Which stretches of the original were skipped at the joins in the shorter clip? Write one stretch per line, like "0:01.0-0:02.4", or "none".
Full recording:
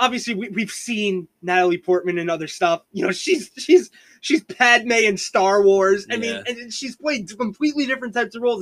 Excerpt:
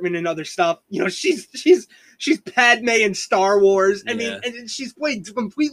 none